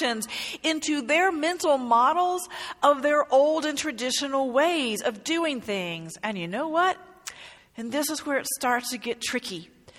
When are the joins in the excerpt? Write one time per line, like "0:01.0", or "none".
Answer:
0:07.6